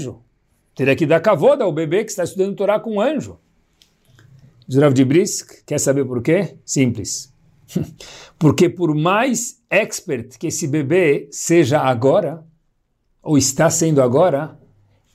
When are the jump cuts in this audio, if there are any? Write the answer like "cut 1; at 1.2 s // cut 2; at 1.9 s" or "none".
none